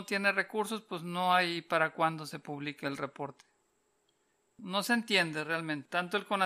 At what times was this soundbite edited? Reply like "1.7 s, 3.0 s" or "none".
none